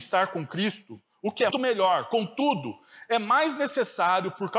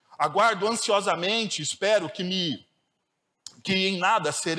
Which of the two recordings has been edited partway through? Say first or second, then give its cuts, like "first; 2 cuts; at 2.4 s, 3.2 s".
first; 1 cut; at 1.5 s